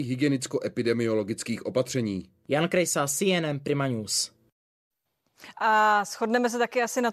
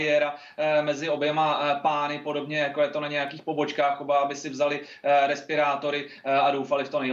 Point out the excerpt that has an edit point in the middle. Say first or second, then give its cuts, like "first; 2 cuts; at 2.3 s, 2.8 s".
first; 1 cut; at 5.5 s